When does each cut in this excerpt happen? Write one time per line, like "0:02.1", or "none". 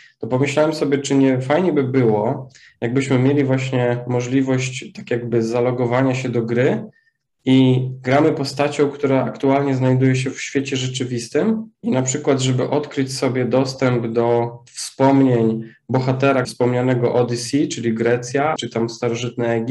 0:11.7
0:16.4
0:18.6